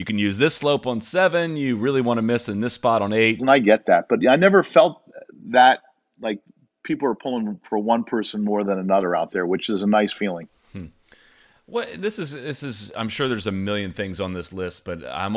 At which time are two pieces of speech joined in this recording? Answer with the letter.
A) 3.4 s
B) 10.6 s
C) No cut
A